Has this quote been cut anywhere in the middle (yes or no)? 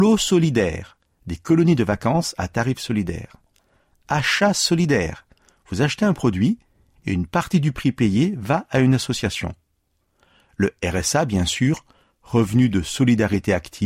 no